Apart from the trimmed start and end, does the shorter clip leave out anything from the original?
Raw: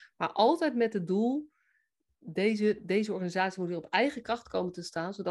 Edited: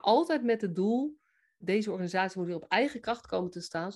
yes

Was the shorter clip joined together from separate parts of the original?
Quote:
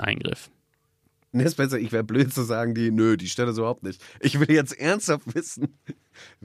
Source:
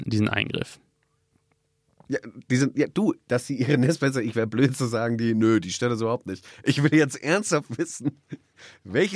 yes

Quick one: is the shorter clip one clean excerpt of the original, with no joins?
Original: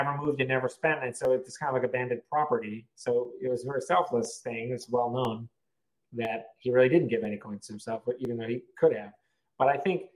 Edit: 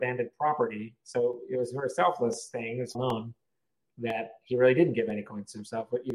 no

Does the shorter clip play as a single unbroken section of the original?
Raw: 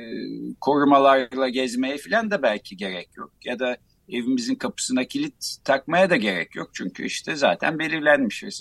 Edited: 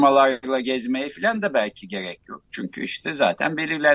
no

